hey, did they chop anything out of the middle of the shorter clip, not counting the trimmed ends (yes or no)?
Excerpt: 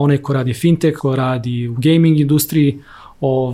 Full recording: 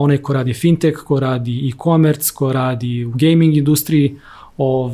yes